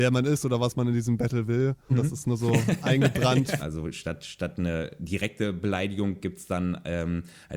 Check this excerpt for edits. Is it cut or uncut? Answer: cut